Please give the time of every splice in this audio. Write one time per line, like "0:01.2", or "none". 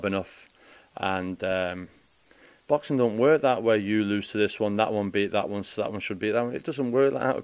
none